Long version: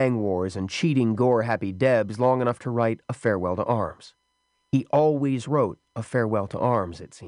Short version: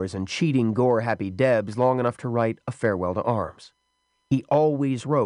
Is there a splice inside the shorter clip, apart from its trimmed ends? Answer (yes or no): no